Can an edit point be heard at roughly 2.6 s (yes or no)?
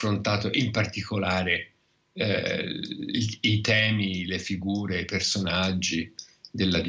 no